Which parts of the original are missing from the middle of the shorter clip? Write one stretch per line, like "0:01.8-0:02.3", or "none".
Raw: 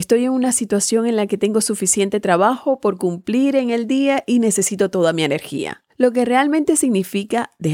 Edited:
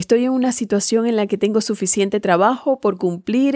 none

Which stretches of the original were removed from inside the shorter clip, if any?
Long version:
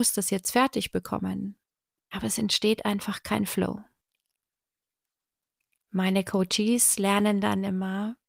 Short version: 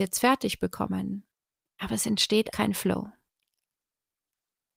0:02.8-0:03.2

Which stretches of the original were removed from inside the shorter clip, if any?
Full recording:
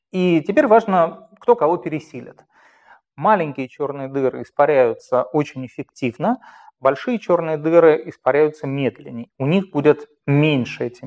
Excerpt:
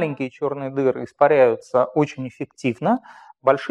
none

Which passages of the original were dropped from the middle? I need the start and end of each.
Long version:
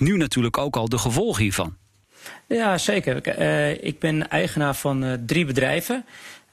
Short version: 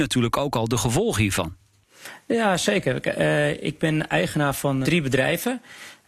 0:05.0-0:05.3

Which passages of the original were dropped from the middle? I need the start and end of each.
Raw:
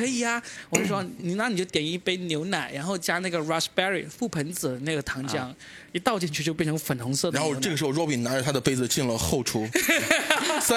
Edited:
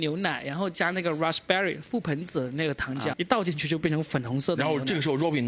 0:05.4-0:05.9

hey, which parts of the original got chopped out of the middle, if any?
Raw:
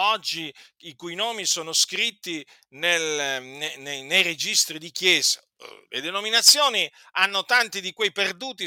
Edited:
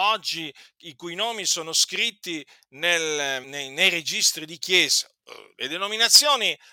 0:03.4-0:03.8

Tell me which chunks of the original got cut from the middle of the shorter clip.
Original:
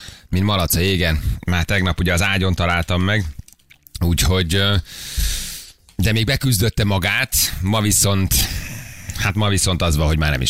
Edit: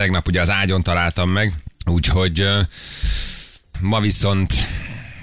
0:03.5-0:03.9
0:05.9-0:07.6

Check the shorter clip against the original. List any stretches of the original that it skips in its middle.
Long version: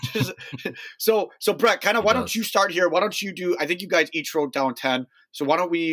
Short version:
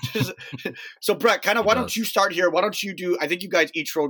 0:01.0-0:01.3

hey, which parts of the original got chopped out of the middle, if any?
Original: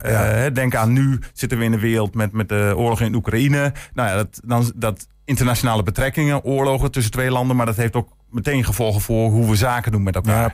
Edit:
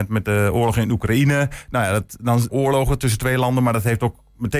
0:04.7-0:06.4

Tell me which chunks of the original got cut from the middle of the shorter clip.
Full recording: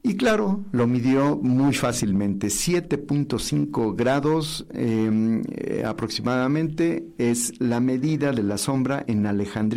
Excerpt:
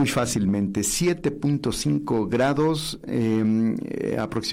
none

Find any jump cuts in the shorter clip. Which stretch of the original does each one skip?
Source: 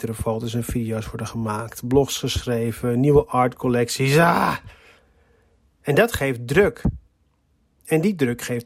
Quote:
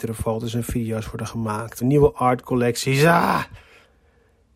0:01.8-0:02.9

